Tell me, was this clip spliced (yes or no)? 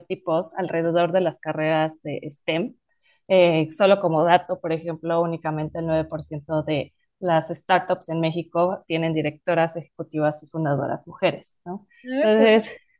no